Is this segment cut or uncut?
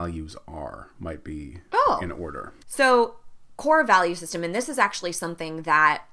cut